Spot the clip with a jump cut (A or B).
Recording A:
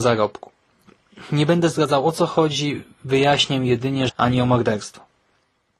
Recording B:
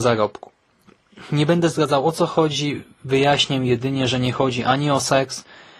A